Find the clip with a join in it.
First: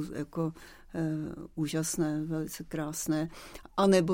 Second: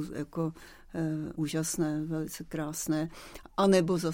second; 1 cut; at 1.3 s

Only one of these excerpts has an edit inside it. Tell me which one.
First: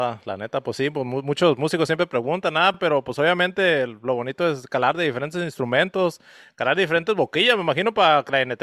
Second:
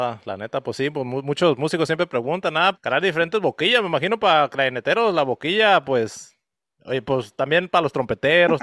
second; 1 cut; at 2.7 s

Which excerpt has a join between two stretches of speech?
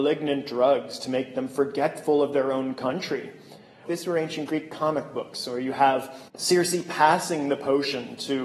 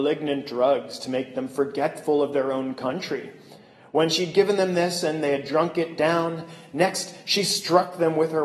first; 2 cuts; at 3.9 s, 6.3 s

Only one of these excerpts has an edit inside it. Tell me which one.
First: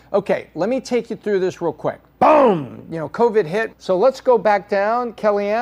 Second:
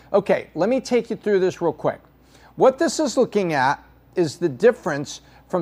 first; 2 cuts; at 2.2 s, 3.7 s

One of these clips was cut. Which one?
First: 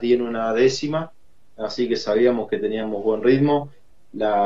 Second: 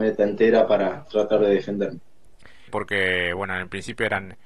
second; 1 cut; at 2.7 s

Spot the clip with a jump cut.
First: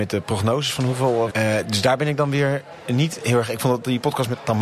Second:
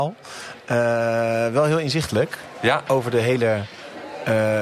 first; 1 cut; at 1.3 s

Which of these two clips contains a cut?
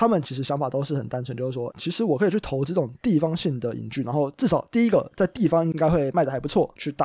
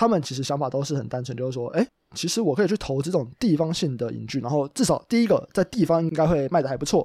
first; 1 cut; at 1.7 s

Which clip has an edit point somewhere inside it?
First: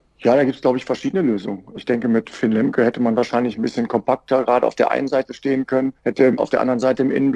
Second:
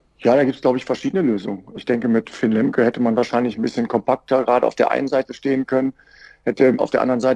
first; 1 cut; at 6.0 s

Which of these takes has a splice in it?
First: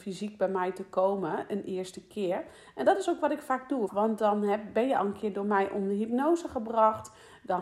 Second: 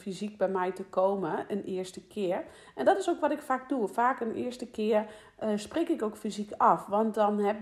first; 1 cut; at 3.9 s

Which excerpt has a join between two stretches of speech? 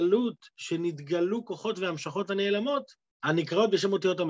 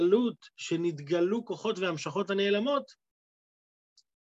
first; 1 cut; at 3.1 s

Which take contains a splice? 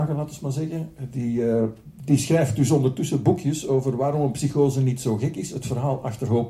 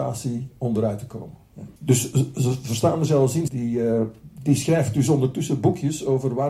second; 2 cuts; at 1.8 s, 3.5 s

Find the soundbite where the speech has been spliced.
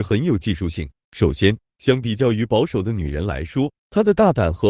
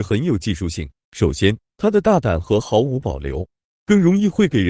second; 1 cut; at 1.6 s

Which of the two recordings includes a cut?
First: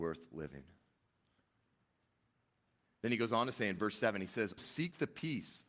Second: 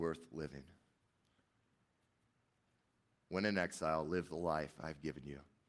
first; 2 cuts; at 2.8 s, 4.6 s

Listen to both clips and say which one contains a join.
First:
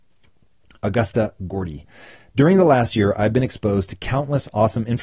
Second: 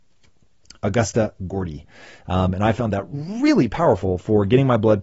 second; 1 cut; at 2.2 s

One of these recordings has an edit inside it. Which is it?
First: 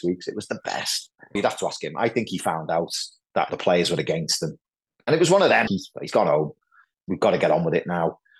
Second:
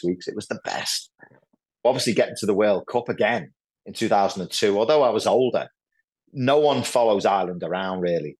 first; 2 cuts; at 1.4 s, 5.7 s

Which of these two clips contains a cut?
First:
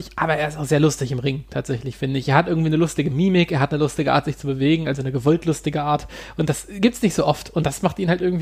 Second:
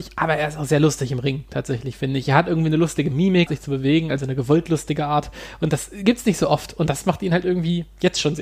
second; 1 cut; at 3.5 s

